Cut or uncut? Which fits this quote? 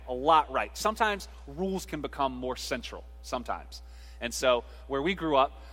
uncut